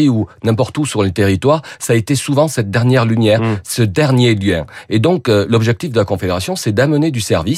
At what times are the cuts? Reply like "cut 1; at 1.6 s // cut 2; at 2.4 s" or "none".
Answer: none